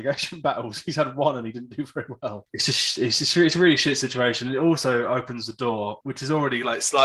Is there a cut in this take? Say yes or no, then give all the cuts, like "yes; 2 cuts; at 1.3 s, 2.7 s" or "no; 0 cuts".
yes; 1 cut; at 2.5 s